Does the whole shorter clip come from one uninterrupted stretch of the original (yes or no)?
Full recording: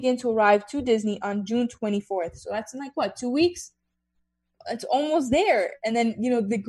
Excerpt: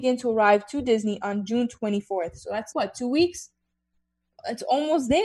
no